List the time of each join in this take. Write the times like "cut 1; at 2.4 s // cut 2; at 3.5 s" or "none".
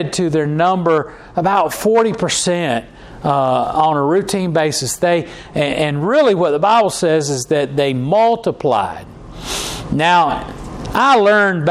none